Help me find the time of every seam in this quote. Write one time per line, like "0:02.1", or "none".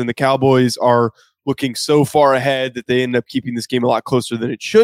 none